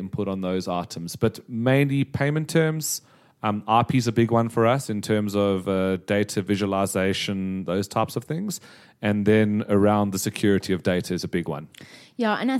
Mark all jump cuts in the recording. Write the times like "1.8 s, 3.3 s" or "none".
none